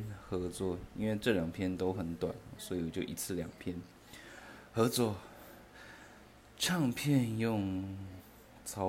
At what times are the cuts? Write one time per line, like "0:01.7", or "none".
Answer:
none